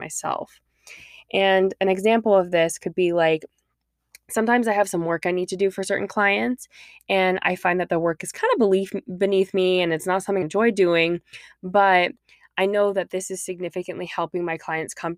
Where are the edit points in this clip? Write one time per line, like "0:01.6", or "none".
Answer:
0:10.4